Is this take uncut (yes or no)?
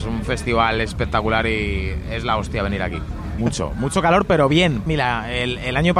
no